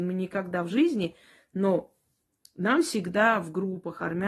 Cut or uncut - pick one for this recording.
uncut